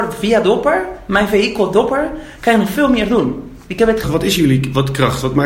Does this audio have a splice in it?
yes; 1 cut; at 4.0 s

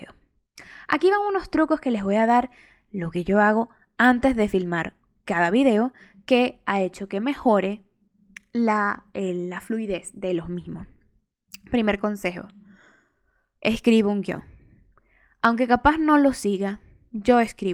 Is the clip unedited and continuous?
yes; 0 cuts

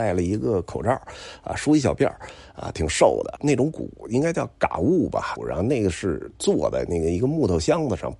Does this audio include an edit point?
yes; 2 cuts; at 3.4 s, 5.4 s

